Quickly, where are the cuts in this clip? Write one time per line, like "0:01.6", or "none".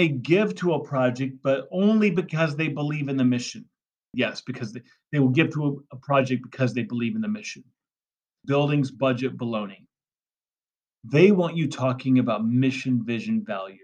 0:04.1
0:08.4